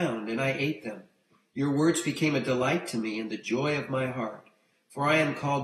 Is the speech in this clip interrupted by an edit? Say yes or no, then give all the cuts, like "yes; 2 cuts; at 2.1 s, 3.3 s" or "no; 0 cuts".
no; 0 cuts